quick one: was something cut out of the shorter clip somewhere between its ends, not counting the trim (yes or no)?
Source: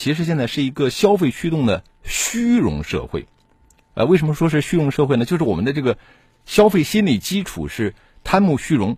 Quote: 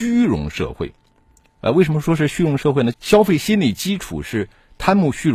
yes